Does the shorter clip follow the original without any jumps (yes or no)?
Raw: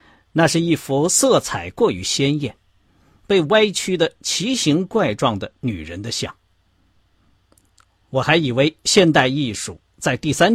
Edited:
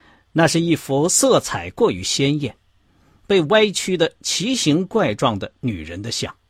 yes